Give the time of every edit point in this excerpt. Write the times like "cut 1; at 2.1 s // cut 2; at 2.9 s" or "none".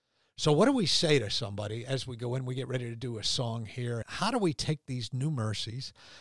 cut 1; at 4.0 s